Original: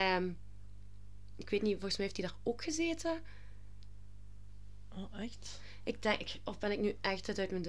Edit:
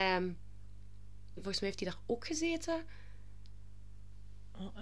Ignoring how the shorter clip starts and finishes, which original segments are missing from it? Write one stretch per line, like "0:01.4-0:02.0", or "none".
0:01.4-0:01.7